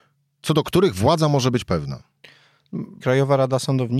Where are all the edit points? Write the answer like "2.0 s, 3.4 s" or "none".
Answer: 3.0 s